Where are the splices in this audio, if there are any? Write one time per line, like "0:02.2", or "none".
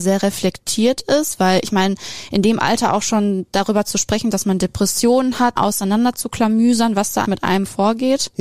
0:05.6
0:07.2